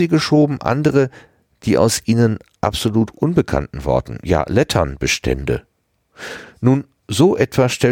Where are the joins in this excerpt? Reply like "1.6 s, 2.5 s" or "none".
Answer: none